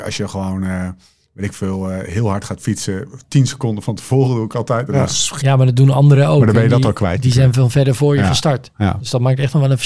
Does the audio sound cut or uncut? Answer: cut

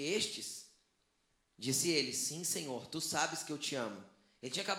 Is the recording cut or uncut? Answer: uncut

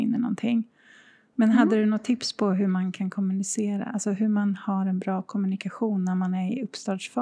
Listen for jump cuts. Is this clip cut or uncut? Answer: cut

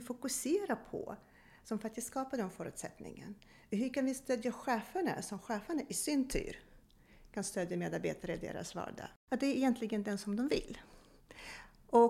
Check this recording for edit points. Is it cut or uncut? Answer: cut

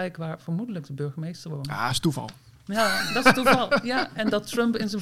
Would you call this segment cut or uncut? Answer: uncut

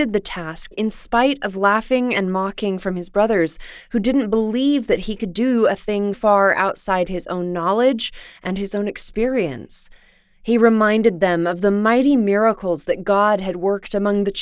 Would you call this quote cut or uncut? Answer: cut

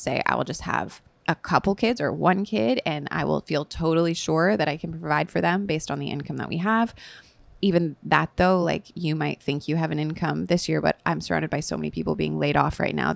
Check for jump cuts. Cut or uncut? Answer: uncut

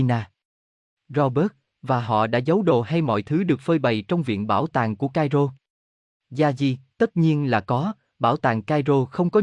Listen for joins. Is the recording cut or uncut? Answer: uncut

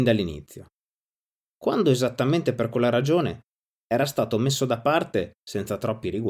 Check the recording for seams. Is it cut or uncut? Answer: uncut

